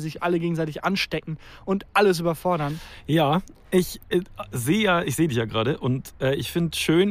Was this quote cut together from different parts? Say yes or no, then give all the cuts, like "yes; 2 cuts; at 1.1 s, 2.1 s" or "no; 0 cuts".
no; 0 cuts